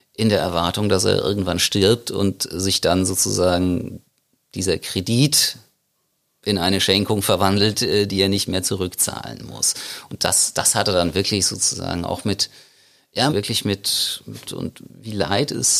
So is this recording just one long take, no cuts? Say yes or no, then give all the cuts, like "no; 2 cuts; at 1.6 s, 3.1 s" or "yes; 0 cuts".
no; 2 cuts; at 13.3 s, 14.4 s